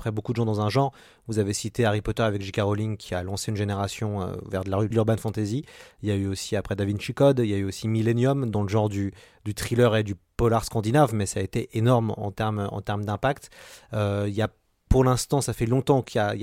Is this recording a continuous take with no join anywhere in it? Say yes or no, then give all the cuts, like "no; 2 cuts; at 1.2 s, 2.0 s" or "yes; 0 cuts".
no; 1 cut; at 4.9 s